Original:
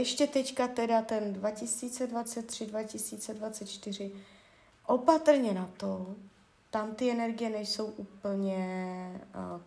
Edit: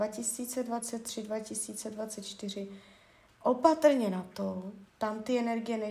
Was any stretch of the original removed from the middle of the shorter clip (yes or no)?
yes